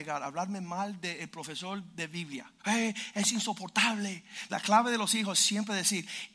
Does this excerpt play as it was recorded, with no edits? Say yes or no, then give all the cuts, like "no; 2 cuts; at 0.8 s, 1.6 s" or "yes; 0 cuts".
no; 2 cuts; at 2.6 s, 4.5 s